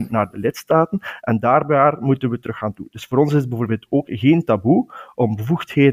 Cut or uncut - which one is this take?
cut